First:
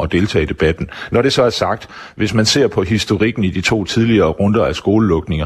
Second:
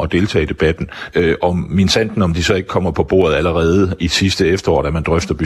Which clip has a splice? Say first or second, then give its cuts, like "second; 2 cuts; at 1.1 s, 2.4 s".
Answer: second; 1 cut; at 1.1 s